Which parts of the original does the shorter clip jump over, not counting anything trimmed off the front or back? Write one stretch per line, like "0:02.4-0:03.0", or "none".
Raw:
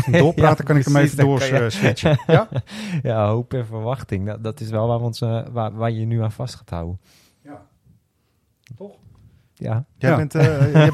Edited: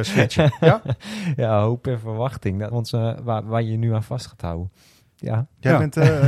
0:04.4-0:05.0
0:07.3-0:09.4